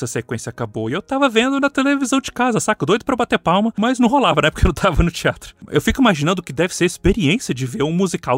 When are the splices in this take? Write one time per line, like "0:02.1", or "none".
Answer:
none